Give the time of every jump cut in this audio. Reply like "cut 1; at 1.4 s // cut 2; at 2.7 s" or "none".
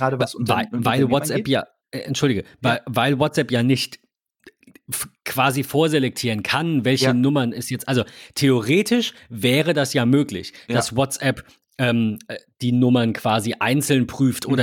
none